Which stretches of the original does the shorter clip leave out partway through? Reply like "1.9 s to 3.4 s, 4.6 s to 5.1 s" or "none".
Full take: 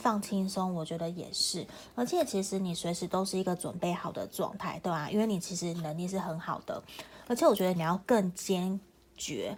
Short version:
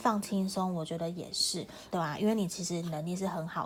1.9 s to 4.8 s